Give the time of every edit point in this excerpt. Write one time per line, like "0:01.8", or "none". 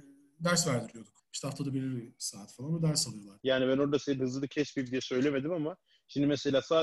0:01.2
0:03.4